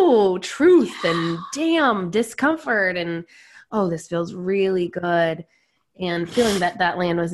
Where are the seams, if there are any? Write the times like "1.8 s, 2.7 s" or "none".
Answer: none

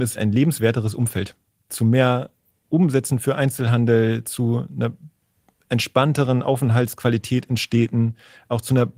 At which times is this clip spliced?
1.7 s

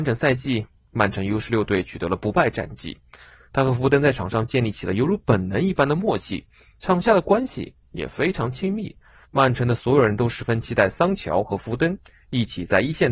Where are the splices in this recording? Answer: 3.5 s, 9.2 s

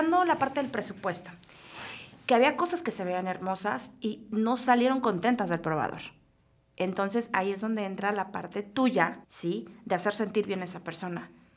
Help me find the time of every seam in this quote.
9.2 s

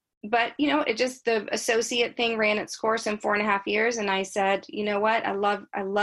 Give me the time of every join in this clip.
none

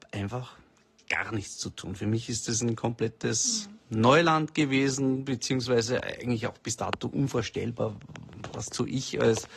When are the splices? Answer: none

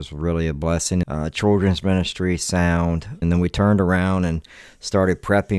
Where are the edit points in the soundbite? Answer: 1.0 s, 3.2 s

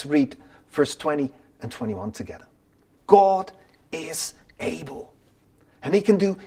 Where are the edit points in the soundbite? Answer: 3.0 s

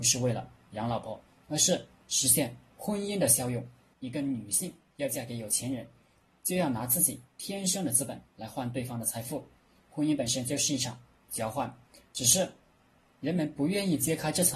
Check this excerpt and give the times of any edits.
3.9 s

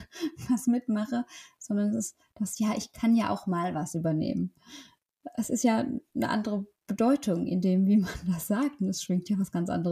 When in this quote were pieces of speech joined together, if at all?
none

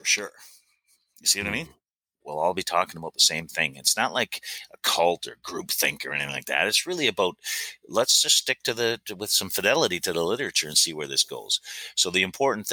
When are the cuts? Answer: 2.2 s

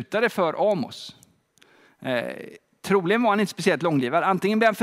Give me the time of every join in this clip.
none

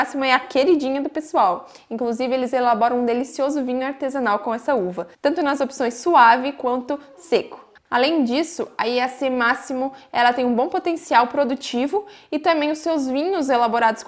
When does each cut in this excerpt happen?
5.1 s, 7.8 s

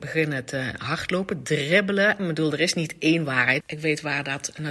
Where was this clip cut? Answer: 2.2 s, 3.6 s

